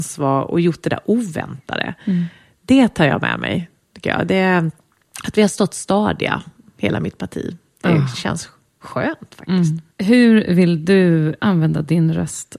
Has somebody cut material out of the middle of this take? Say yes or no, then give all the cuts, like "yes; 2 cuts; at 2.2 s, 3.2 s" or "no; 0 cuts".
yes; 2 cuts; at 9.9 s, 11.4 s